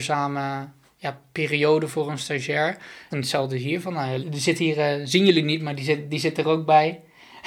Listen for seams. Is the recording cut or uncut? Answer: cut